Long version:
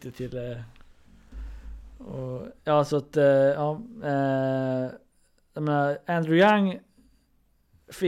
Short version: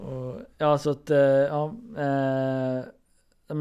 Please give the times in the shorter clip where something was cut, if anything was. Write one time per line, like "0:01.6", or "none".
none